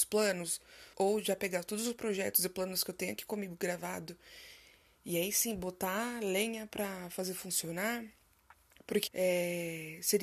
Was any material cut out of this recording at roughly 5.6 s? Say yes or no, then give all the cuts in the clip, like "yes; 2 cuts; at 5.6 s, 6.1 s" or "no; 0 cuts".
no; 2 cuts; at 0.9 s, 9.1 s